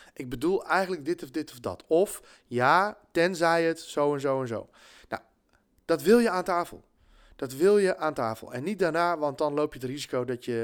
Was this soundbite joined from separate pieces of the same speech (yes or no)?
no